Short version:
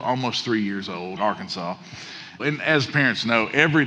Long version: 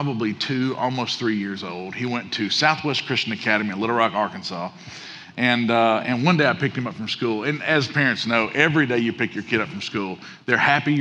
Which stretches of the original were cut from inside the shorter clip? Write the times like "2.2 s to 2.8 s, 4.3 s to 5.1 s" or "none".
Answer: 1.9 s to 4.1 s, 5.3 s to 7.4 s